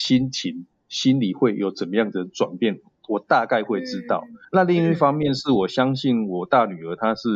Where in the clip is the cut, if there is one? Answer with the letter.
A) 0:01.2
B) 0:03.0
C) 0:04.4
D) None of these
C